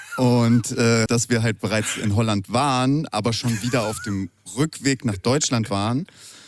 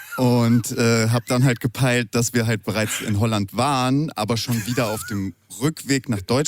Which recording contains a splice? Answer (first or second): first